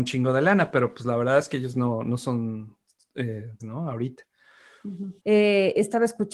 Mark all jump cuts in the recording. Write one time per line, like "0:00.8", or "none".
0:03.6
0:05.2